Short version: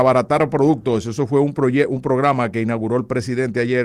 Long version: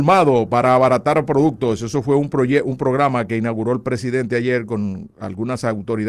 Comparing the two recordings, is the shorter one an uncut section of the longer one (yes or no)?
yes